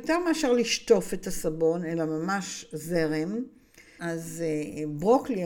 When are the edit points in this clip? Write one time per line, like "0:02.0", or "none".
0:04.0